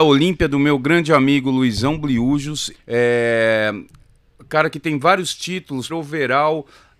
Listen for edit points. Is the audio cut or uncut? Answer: cut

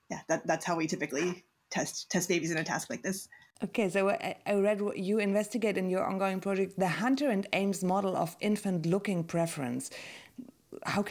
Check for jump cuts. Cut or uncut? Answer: uncut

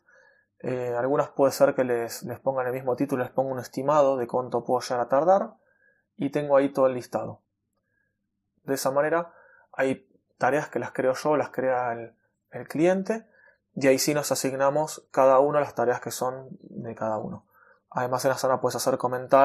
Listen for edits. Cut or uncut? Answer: cut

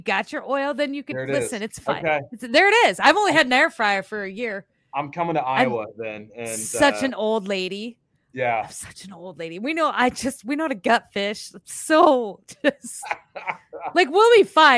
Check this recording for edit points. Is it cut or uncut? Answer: uncut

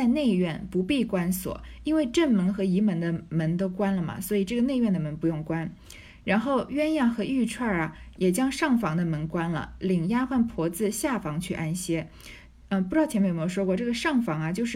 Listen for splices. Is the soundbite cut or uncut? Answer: uncut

